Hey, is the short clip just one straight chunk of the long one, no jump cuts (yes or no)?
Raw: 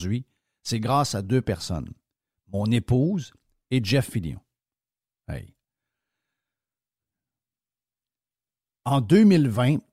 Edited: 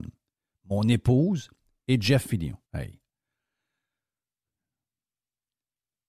no